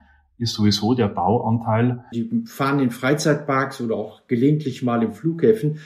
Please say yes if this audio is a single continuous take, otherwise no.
no